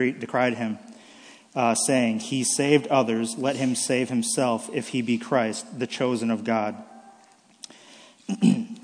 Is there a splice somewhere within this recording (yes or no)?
no